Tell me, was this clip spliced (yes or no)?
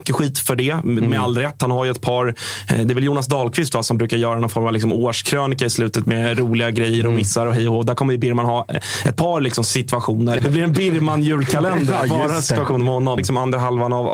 yes